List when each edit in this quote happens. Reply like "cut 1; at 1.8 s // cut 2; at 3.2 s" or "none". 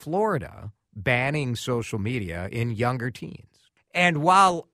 cut 1; at 3.8 s